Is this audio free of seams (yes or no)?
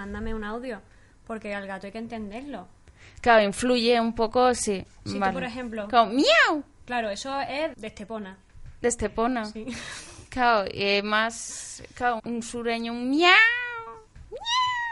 no